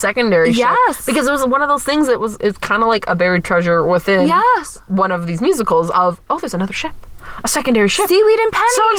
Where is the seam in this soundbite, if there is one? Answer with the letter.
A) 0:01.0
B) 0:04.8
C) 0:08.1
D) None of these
D